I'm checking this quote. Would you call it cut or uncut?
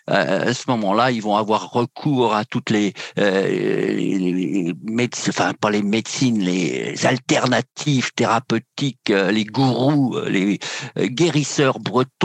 uncut